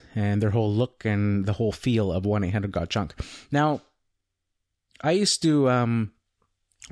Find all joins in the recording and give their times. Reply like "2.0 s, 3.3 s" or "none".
none